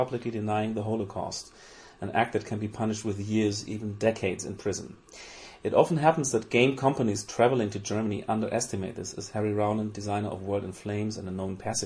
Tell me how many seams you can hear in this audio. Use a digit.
0